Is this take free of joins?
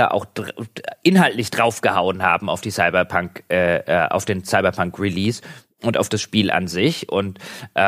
yes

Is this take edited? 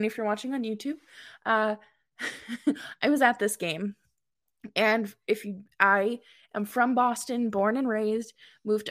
no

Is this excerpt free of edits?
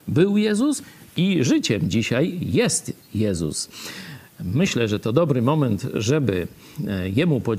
yes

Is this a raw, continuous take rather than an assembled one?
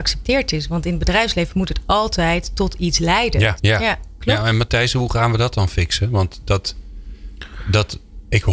no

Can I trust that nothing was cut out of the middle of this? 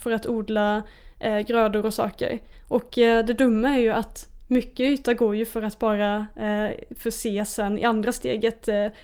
no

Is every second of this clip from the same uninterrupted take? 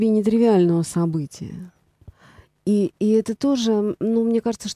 yes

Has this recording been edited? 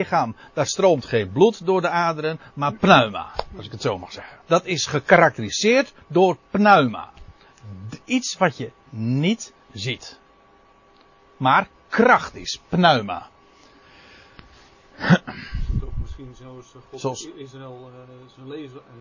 yes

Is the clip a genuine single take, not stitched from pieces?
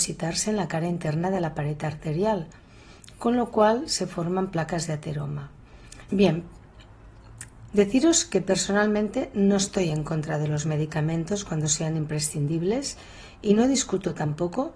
no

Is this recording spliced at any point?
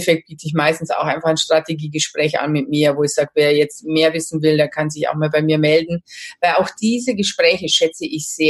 no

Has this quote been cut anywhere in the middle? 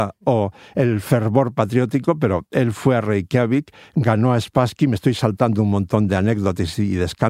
no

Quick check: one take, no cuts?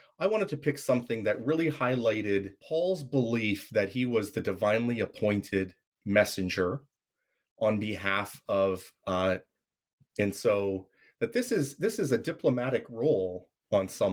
no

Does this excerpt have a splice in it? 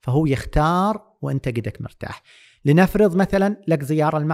no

